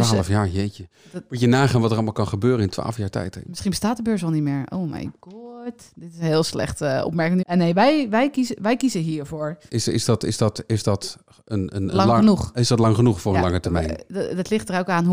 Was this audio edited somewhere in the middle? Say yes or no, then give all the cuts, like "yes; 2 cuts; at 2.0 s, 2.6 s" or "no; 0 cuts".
yes; 2 cuts; at 7.4 s, 9.7 s